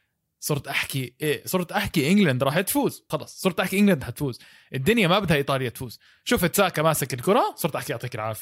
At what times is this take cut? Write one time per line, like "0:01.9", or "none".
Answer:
0:01.2
0:03.1